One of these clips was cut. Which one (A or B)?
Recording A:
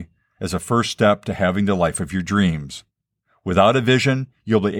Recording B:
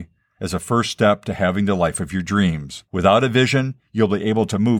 B